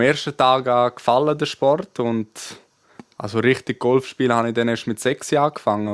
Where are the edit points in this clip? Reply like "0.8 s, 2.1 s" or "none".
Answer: none